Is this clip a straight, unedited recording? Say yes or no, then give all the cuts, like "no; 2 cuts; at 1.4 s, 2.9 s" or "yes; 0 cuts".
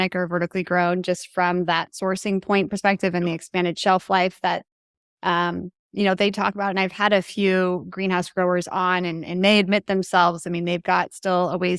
yes; 0 cuts